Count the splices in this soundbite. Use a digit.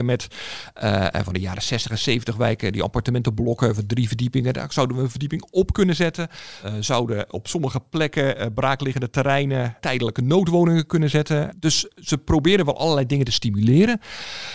0